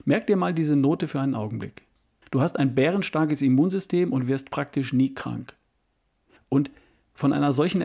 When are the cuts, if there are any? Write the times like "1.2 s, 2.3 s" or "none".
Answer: 2.2 s, 6.4 s